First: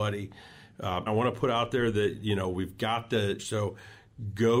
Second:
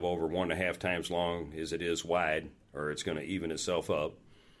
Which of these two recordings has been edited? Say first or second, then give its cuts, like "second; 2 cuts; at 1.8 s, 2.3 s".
first; 2 cuts; at 1.1 s, 3.4 s